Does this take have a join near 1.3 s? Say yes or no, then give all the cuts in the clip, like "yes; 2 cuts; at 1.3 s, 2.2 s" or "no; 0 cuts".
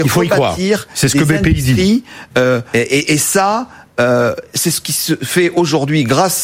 no; 1 cut; at 2.7 s